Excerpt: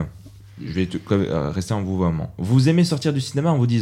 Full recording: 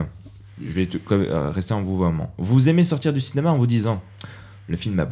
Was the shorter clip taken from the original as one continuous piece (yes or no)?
yes